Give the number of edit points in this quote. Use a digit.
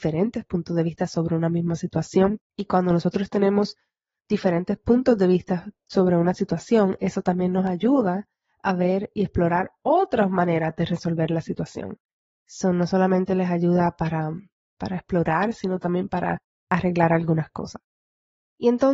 1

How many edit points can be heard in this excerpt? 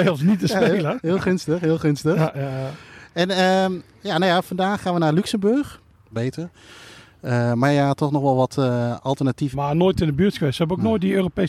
2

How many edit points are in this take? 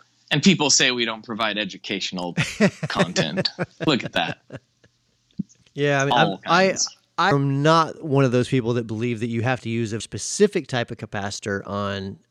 3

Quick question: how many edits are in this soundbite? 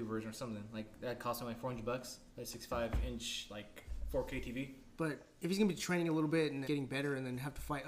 3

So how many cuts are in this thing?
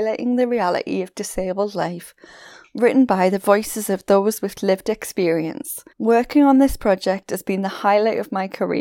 1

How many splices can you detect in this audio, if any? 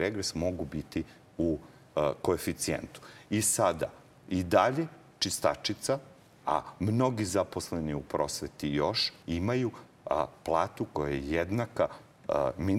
3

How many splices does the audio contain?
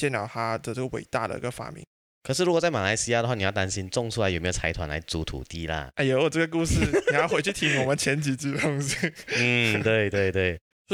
0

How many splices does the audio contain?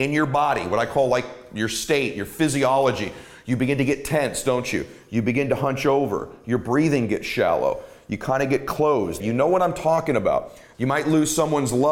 2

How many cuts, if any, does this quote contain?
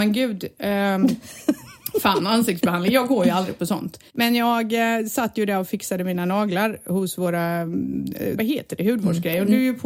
2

